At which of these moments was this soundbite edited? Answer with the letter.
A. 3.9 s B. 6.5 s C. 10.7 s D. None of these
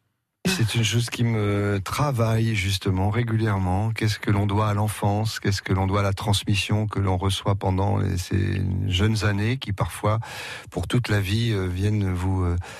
D